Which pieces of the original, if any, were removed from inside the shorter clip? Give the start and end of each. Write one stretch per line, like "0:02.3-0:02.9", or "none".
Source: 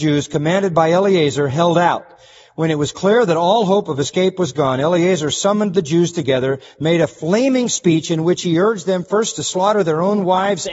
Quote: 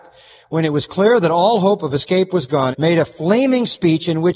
0:04.8-0:06.7